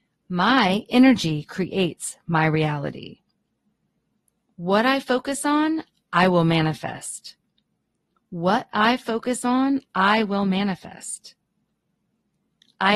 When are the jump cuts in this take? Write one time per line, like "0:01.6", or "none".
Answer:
none